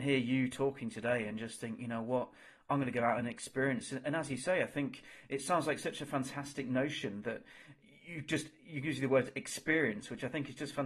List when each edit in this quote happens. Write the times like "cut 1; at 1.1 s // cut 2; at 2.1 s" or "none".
none